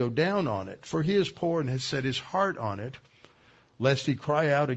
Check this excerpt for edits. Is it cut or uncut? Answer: uncut